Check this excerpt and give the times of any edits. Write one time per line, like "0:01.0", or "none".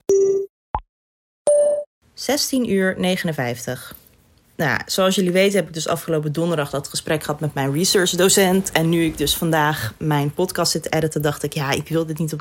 none